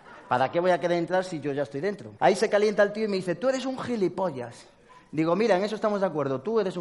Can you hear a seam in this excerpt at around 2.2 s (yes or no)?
yes